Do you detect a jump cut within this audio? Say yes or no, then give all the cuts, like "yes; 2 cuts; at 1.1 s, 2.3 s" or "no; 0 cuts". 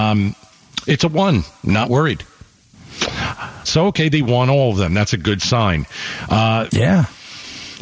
yes; 2 cuts; at 3.6 s, 6.7 s